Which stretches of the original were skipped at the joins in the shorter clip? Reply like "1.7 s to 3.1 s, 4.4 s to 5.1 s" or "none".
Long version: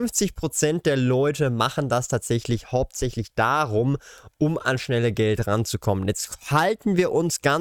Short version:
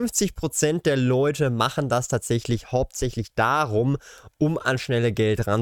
none